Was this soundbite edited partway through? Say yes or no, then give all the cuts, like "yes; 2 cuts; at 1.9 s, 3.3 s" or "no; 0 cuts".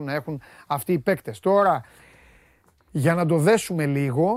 no; 0 cuts